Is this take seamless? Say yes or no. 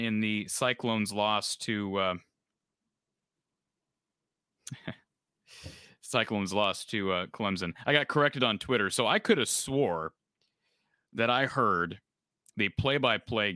yes